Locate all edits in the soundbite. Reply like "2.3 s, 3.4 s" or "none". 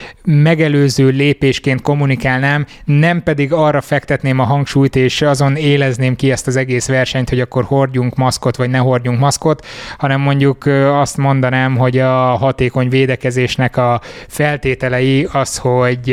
none